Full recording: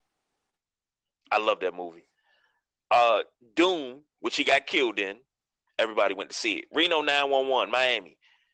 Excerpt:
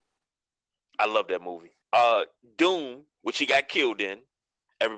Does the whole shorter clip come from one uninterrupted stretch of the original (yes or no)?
no